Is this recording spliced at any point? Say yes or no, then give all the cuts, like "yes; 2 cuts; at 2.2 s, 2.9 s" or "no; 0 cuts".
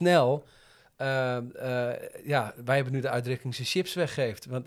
no; 0 cuts